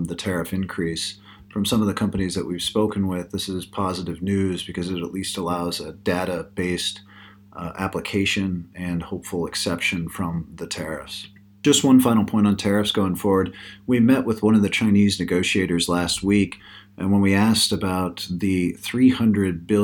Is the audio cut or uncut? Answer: uncut